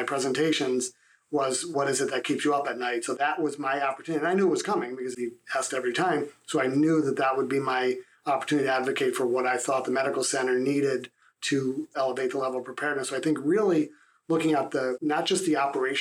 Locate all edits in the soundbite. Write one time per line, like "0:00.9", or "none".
none